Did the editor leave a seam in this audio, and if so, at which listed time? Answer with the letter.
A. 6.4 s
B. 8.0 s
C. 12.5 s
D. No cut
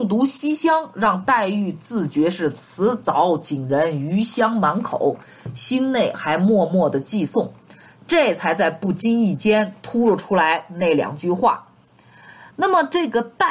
D